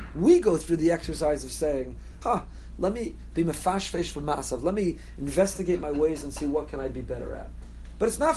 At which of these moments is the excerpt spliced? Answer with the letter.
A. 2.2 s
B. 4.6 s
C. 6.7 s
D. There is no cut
A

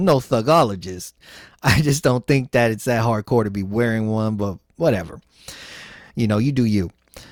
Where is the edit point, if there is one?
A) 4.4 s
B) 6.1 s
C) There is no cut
C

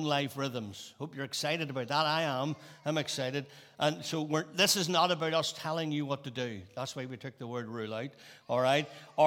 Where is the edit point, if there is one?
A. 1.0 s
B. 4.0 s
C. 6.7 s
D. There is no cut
D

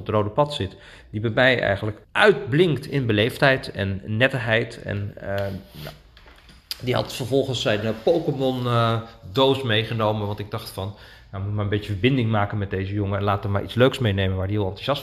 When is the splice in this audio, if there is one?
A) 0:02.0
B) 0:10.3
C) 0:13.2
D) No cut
A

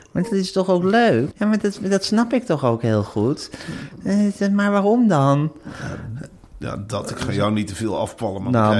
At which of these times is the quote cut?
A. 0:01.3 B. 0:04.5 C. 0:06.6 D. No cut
A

